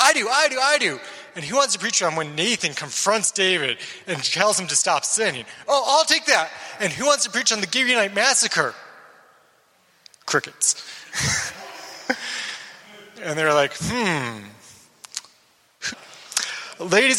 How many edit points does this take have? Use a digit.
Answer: 1